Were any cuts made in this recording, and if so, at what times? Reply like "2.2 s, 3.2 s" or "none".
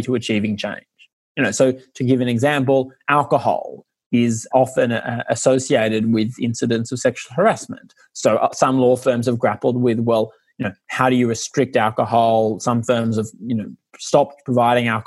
none